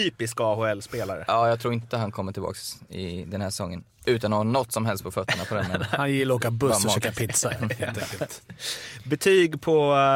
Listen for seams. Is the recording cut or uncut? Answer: uncut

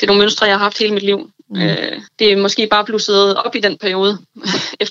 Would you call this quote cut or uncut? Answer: cut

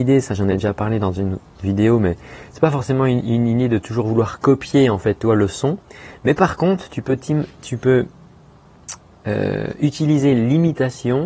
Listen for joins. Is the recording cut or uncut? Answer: uncut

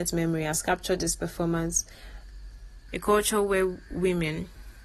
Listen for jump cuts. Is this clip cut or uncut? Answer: cut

